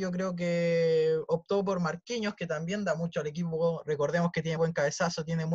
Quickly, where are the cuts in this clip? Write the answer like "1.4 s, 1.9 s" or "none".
4.6 s